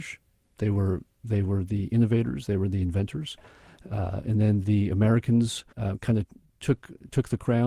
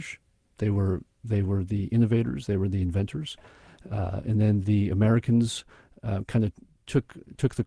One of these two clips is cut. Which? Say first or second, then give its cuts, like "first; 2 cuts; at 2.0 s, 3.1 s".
first; 1 cut; at 5.7 s